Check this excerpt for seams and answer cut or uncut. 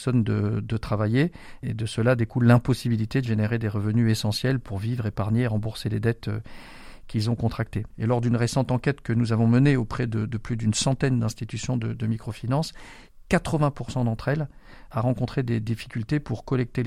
cut